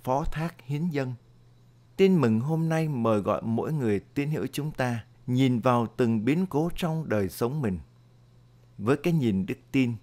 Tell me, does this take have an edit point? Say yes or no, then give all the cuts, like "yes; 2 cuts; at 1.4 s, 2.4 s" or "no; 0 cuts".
yes; 2 cuts; at 1.8 s, 5.1 s